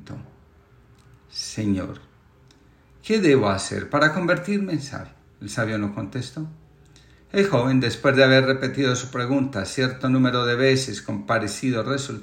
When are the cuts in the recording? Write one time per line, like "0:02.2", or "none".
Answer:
none